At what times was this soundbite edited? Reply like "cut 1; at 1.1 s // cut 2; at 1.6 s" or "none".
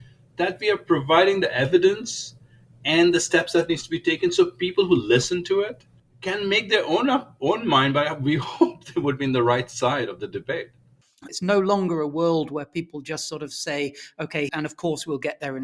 cut 1; at 11.3 s // cut 2; at 14.5 s